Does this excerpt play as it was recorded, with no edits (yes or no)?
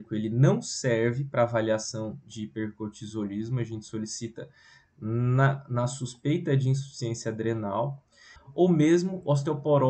no